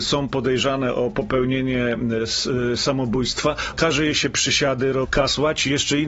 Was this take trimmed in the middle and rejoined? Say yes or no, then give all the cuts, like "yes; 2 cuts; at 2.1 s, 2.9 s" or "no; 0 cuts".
yes; 2 cuts; at 3.7 s, 5.0 s